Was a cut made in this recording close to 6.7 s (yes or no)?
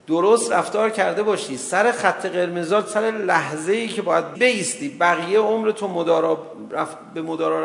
no